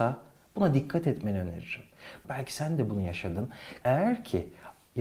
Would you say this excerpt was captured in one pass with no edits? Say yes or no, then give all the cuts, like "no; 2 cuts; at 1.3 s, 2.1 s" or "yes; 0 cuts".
no; 2 cuts; at 2.2 s, 3.8 s